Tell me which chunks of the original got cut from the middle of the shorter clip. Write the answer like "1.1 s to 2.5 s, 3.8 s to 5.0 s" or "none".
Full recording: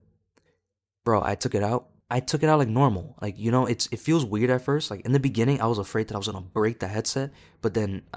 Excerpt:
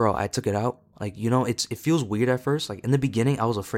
2.0 s to 3.1 s